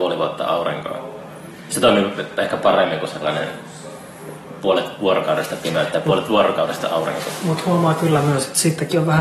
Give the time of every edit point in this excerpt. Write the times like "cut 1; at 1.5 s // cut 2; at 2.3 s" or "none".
none